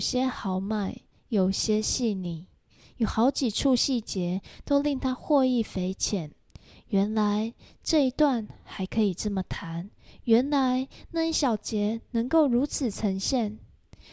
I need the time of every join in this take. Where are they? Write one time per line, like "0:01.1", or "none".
none